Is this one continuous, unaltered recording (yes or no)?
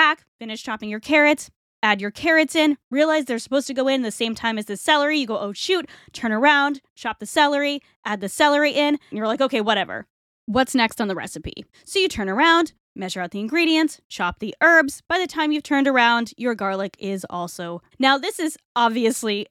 no